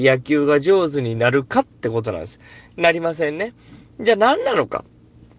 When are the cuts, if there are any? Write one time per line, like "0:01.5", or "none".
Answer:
none